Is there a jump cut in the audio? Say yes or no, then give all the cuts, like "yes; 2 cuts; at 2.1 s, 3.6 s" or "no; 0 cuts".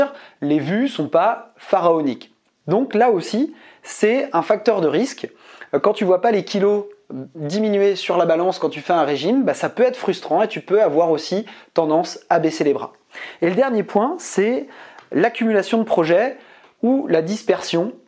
no; 0 cuts